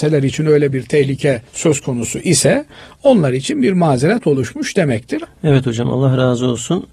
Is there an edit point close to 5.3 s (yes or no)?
yes